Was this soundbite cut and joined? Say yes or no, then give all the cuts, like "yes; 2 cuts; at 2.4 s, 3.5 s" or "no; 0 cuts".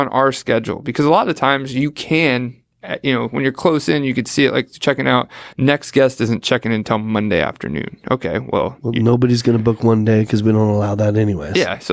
yes; 1 cut; at 5.5 s